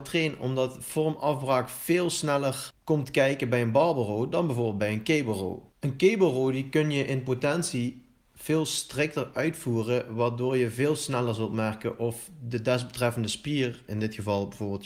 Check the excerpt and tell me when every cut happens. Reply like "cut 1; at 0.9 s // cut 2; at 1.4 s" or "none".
cut 1; at 5.7 s

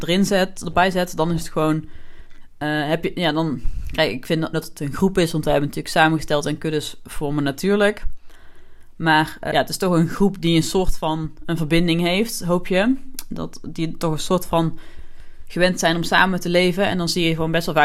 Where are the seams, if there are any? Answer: cut 1; at 4.5 s // cut 2; at 9.5 s

